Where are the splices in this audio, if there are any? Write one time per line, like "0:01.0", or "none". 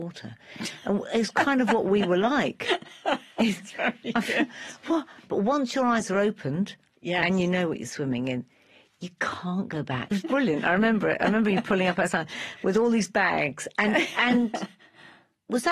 0:10.1